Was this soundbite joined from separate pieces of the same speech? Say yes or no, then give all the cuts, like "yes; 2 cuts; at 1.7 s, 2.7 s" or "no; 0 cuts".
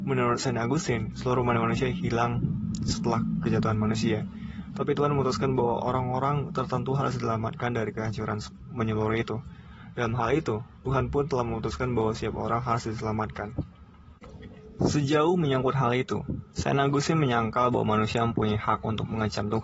no; 0 cuts